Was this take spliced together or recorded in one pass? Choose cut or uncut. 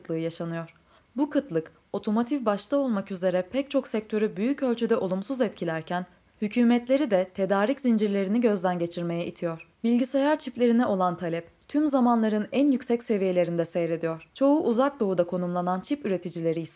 uncut